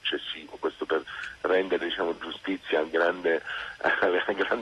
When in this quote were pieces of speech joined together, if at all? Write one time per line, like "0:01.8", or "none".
none